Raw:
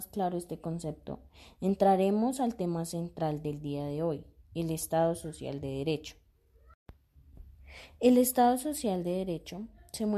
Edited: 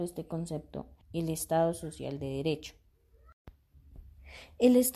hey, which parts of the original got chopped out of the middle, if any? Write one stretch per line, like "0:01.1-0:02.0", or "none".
0:01.3-0:04.4

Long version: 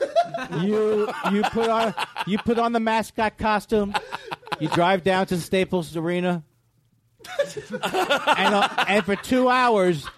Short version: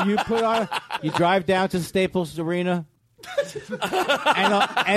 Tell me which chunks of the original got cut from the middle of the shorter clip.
0:02.2-0:04.6
0:06.5-0:07.0

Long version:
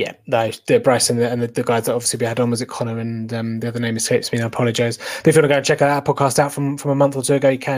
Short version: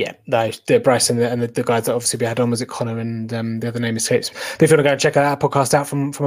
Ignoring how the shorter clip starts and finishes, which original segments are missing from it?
0:04.3-0:05.0

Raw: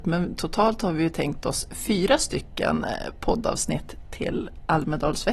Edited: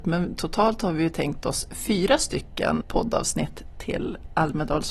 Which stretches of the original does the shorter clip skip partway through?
0:02.8-0:03.1

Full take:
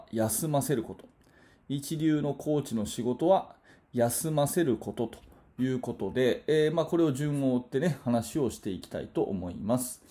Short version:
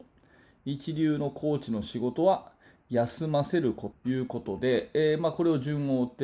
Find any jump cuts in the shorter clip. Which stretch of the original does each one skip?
0:04.9-0:05.4

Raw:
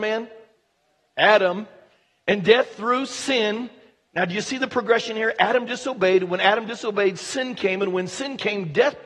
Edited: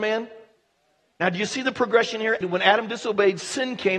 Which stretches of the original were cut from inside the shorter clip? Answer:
0:01.0-0:04.0
0:05.4-0:06.2

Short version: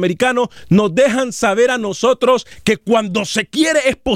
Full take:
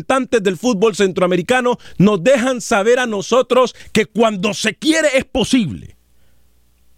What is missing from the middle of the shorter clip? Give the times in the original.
none

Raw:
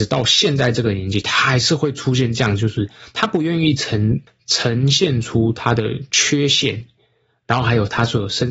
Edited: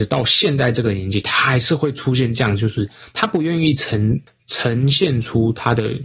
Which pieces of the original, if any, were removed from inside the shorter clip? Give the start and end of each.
none

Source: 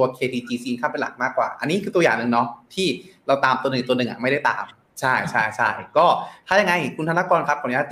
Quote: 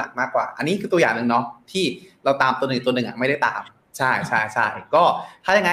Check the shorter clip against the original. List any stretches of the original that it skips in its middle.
none

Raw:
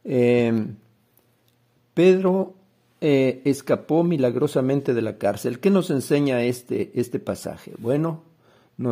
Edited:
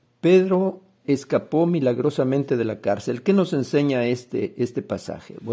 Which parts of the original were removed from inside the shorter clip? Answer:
0:02.8-0:03.4

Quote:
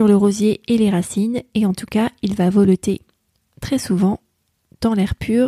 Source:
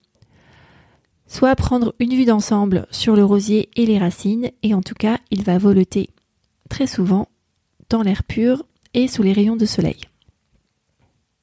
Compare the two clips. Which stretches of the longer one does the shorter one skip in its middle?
none

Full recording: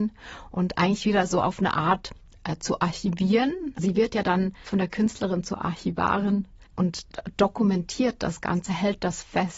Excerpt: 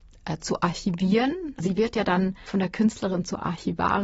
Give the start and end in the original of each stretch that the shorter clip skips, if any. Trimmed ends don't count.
none

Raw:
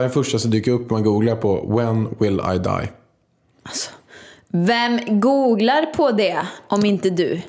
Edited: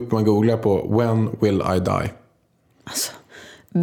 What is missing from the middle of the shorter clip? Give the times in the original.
none

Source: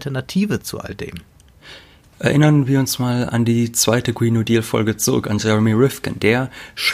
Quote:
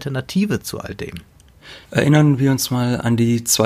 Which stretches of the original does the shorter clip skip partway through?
0:01.8-0:02.1

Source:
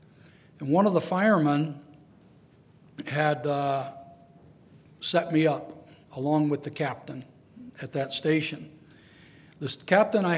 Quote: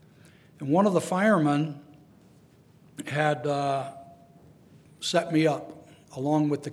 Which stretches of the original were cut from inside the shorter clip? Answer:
none

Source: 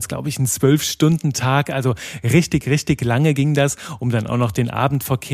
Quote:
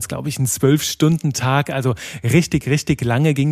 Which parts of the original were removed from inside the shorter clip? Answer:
none

